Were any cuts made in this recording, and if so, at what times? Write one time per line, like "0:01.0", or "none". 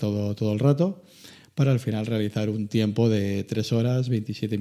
none